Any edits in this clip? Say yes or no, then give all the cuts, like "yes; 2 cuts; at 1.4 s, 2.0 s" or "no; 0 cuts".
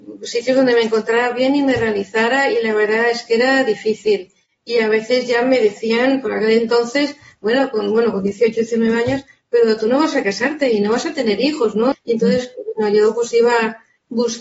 yes; 1 cut; at 11.9 s